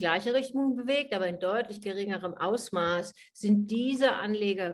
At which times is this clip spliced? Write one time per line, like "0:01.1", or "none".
none